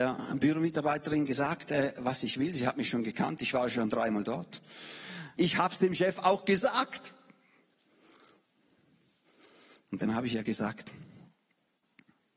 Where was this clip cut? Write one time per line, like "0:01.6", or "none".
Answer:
0:05.4